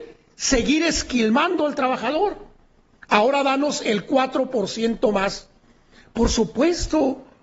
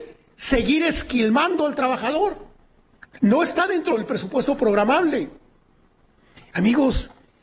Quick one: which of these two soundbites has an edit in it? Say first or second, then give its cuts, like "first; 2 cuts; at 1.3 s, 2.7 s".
second; 1 cut; at 3.0 s